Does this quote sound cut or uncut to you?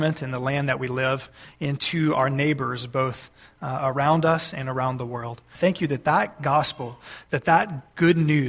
cut